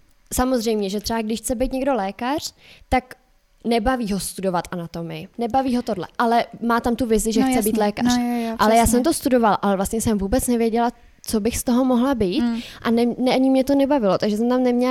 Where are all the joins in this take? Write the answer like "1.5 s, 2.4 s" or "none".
none